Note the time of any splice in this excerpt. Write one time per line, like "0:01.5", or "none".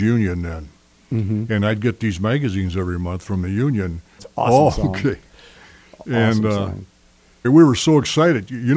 0:04.2
0:07.4